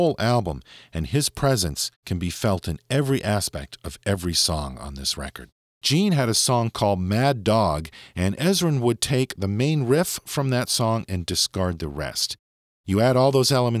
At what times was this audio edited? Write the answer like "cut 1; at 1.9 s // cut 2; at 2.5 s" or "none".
cut 1; at 5.7 s